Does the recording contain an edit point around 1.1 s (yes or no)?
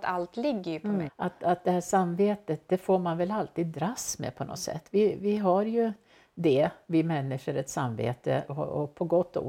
yes